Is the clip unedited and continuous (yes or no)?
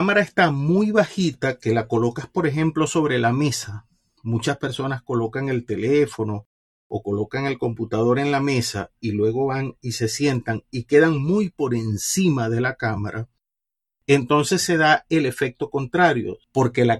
yes